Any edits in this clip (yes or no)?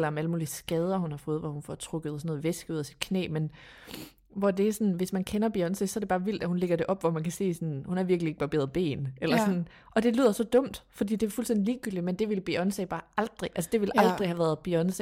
no